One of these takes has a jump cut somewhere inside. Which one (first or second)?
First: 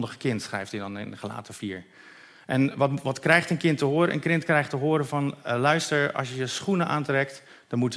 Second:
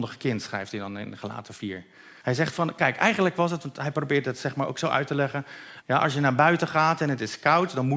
second